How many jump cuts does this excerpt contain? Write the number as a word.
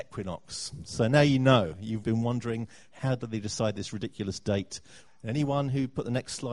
two